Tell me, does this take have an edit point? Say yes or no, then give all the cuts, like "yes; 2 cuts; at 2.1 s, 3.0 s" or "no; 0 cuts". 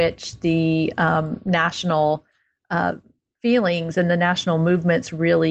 no; 0 cuts